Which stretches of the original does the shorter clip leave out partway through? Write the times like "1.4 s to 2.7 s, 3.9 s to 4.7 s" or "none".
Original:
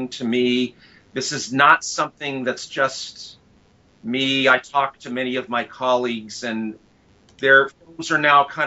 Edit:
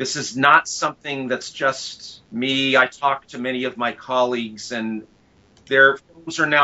3.4 s to 4.0 s